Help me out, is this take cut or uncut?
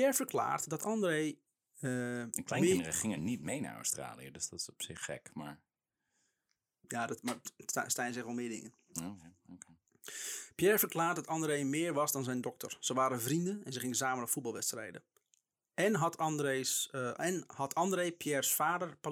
uncut